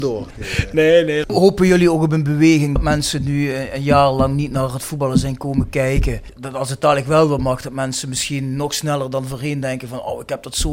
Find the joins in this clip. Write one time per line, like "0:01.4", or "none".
none